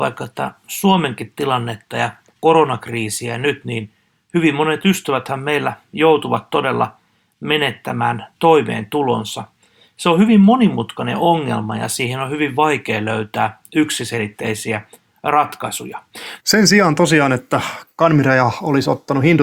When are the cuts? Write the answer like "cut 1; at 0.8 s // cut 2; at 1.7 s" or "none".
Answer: cut 1; at 16.4 s